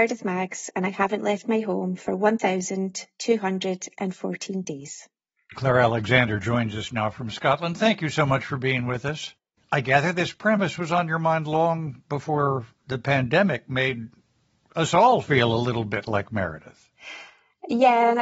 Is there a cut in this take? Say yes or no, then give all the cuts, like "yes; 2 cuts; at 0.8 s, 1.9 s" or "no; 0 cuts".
yes; 1 cut; at 9.6 s